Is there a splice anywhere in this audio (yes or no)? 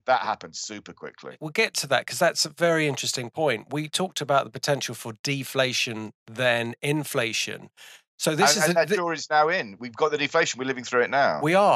no